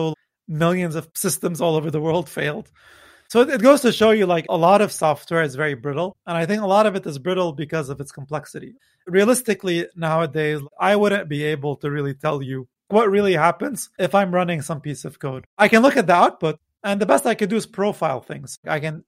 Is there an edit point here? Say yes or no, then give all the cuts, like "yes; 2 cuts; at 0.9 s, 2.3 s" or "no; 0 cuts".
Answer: no; 0 cuts